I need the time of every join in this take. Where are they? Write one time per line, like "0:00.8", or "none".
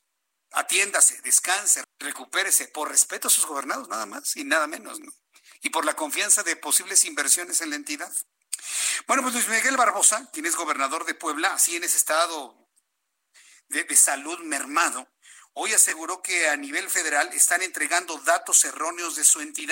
0:01.8